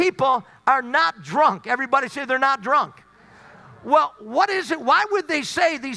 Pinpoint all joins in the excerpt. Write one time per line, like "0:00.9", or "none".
none